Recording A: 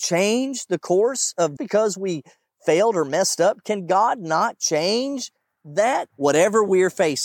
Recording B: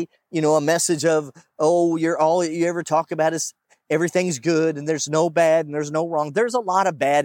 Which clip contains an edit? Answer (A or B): A